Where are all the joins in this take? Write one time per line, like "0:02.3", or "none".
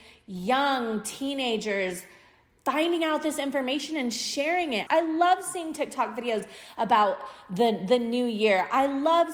0:04.9